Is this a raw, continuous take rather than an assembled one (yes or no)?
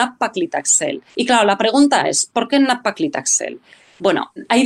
no